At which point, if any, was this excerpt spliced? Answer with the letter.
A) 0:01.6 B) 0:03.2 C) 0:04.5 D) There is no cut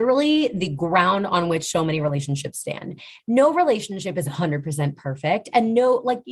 B